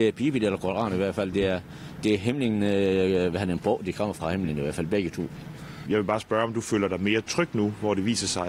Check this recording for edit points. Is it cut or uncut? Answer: cut